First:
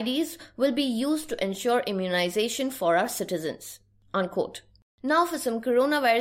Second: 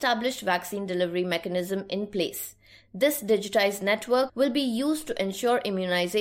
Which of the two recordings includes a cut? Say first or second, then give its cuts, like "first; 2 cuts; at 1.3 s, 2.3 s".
second; 1 cut; at 4.3 s